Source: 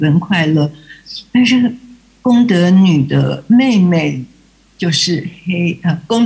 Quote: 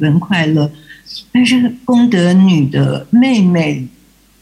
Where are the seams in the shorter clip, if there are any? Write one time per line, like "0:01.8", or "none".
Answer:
0:01.8